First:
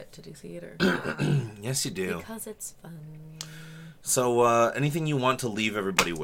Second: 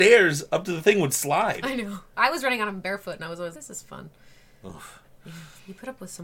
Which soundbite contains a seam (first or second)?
second